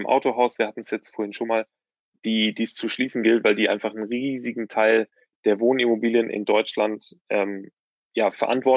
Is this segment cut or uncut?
uncut